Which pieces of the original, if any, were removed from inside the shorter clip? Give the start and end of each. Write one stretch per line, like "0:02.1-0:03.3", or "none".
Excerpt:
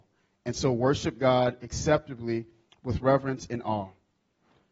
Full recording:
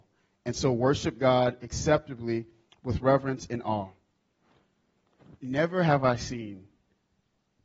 none